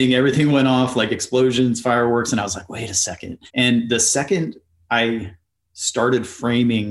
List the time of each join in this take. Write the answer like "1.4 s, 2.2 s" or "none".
3.5 s